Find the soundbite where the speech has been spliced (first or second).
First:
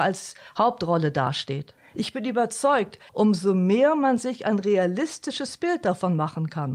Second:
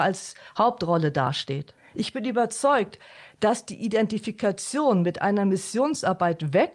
first